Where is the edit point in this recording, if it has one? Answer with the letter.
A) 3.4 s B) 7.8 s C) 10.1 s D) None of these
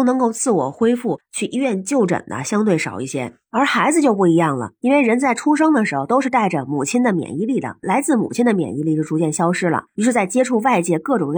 B